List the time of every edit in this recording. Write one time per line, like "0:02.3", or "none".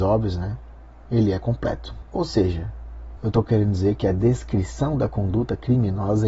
0:02.0
0:03.2